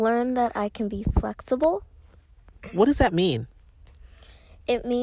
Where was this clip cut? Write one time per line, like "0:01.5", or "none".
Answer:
none

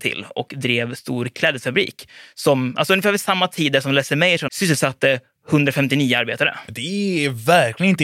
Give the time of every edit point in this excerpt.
0:04.5

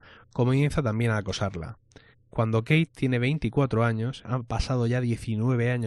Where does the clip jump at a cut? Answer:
0:02.1
0:04.2

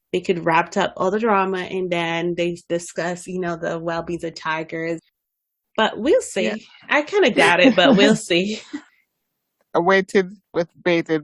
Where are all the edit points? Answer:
none

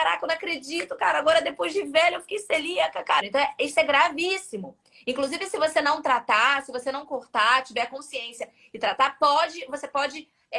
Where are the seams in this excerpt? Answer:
0:03.2

